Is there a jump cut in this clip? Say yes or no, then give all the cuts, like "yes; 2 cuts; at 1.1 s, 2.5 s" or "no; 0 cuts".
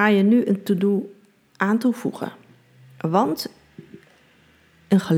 no; 0 cuts